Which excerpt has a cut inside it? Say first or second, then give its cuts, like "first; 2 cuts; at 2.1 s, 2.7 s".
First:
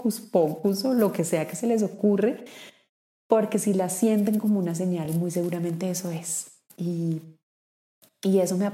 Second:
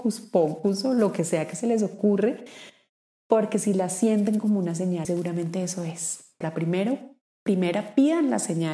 second; 2 cuts; at 5.0 s, 6.4 s